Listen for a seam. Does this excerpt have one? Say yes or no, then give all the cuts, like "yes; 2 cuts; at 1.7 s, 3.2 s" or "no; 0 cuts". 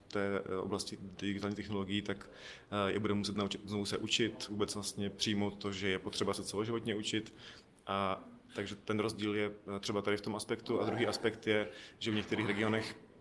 no; 0 cuts